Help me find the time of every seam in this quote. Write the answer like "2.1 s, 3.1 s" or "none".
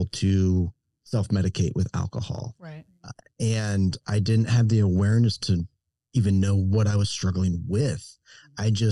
none